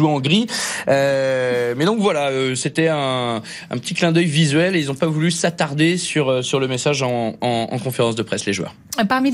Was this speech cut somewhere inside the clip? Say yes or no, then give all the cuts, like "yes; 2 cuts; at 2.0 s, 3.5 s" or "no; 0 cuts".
no; 0 cuts